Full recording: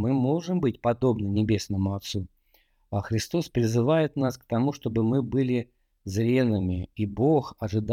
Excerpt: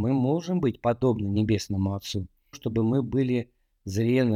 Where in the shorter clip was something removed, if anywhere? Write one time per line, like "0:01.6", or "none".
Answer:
0:02.5